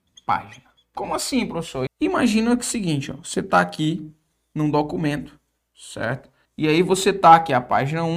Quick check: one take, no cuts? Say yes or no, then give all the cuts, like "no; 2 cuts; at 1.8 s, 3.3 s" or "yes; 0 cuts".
no; 2 cuts; at 1.9 s, 6.5 s